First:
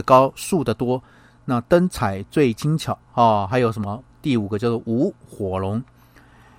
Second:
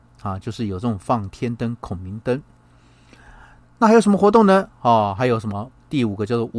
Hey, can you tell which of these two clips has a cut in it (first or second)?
first